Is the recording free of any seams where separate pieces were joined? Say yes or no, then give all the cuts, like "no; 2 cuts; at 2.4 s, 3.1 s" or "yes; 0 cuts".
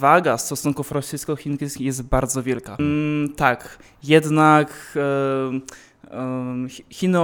no; 1 cut; at 2.8 s